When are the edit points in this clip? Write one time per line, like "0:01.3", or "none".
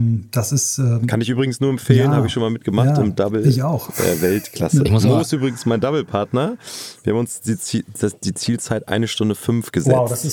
none

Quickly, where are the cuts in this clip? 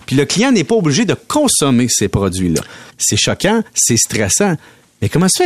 0:02.9

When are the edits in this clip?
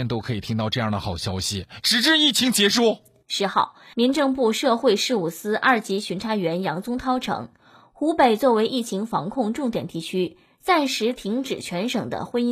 0:01.8

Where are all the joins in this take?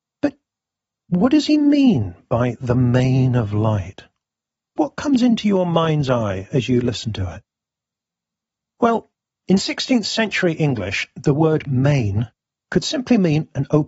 none

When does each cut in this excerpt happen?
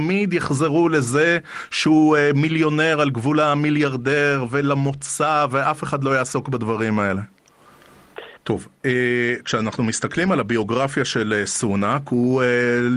0:08.4

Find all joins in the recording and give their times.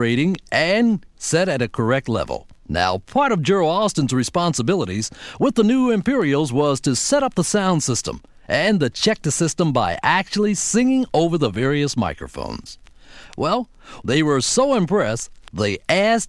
0:02.6
0:14.0

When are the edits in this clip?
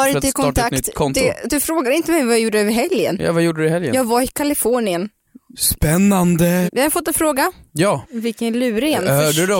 0:05.5
0:06.7
0:08.0

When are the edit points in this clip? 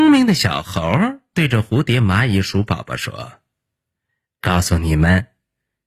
none

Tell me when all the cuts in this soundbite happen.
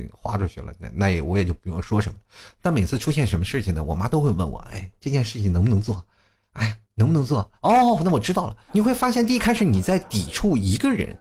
0:07.6
0:08.7

